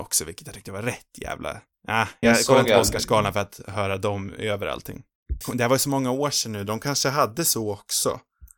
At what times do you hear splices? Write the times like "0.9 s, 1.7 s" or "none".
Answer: 2.2 s, 5.4 s